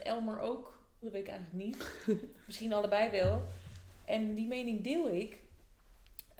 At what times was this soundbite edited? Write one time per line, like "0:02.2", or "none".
0:01.0